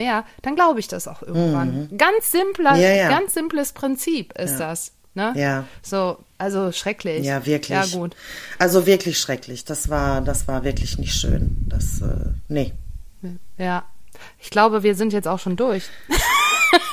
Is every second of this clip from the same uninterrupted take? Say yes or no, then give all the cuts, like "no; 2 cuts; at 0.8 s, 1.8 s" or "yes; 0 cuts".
yes; 0 cuts